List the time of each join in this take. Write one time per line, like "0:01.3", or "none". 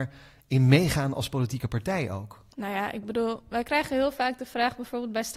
0:02.5

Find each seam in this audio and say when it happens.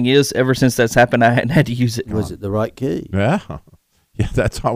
0:02.0

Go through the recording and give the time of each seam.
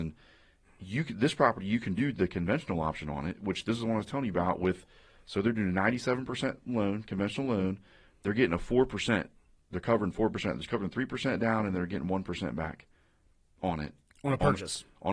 none

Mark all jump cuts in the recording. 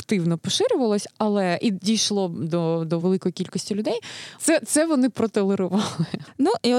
0:03.0
0:04.4

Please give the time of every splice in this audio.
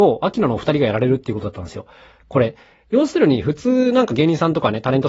none

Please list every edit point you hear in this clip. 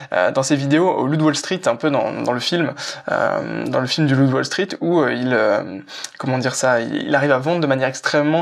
none

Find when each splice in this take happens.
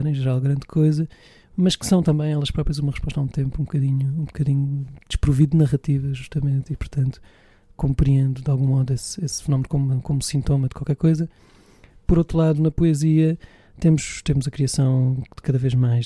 none

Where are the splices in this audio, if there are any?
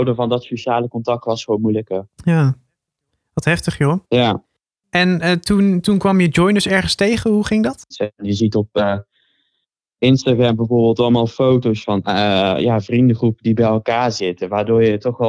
0:04.0
0:07.9

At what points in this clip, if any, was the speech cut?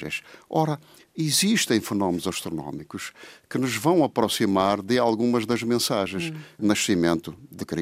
0:06.6

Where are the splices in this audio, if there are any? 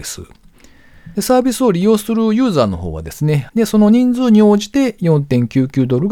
0:01.1
0:03.5

